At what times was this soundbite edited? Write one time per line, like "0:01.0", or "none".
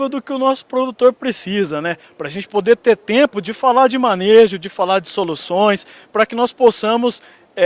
0:06.0